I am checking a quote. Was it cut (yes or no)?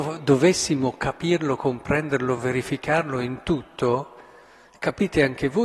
no